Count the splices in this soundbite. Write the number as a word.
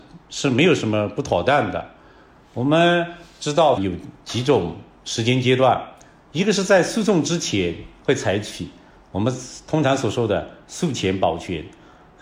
one